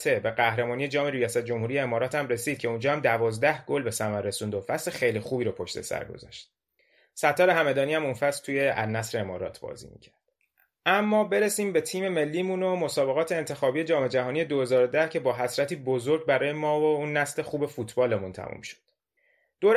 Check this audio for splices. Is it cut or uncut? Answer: uncut